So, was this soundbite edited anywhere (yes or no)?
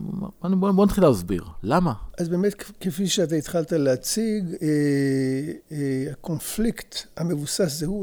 yes